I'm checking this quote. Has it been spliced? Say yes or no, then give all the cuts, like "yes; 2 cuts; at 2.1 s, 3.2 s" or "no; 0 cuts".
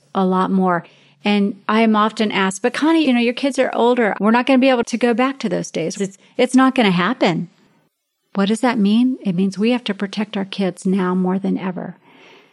yes; 3 cuts; at 3.0 s, 4.1 s, 5.9 s